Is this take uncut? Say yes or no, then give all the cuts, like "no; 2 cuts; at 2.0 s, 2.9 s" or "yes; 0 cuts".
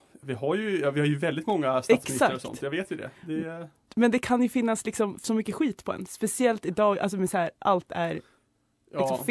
yes; 0 cuts